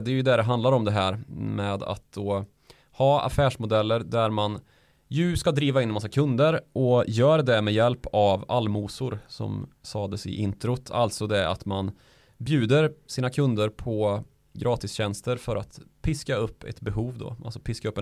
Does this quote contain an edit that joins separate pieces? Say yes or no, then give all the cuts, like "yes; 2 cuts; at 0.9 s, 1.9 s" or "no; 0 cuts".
no; 0 cuts